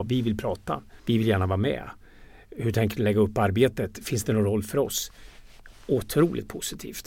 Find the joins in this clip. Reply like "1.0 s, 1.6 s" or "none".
1.0 s